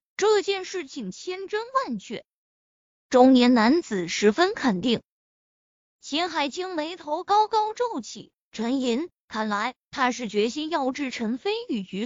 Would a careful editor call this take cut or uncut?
cut